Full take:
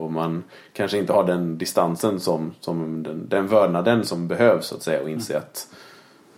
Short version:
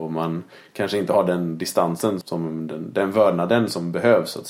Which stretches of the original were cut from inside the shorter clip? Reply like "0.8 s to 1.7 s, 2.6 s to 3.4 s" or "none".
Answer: 2.2 s to 2.6 s